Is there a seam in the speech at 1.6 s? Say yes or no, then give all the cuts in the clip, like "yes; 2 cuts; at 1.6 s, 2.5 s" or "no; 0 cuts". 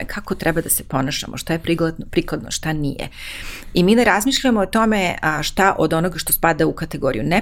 no; 0 cuts